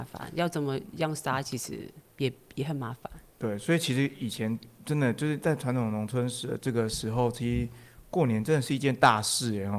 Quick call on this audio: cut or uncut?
uncut